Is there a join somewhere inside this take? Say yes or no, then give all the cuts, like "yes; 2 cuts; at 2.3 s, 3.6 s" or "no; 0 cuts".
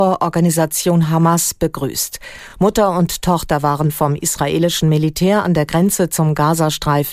no; 0 cuts